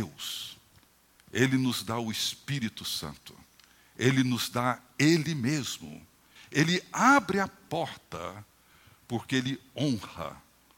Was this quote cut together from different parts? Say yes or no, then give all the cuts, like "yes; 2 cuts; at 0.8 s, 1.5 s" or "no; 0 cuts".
yes; 1 cut; at 6.4 s